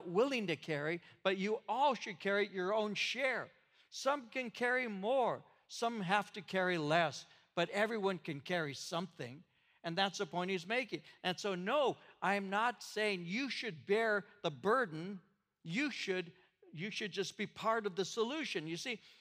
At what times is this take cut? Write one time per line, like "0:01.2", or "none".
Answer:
none